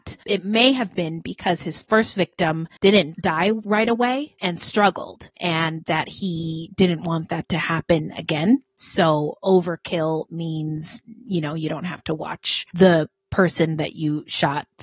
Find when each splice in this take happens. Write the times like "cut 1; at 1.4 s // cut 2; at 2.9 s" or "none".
none